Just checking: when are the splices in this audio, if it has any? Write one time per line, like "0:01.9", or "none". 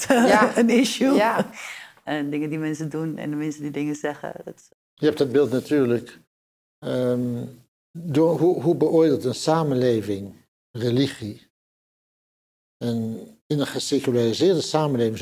none